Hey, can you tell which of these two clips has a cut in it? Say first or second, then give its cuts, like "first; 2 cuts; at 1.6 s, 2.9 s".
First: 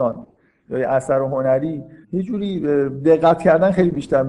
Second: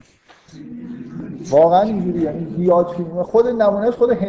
first; 1 cut; at 2.0 s